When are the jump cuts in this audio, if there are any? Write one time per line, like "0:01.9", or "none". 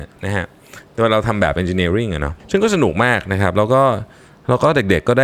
0:02.4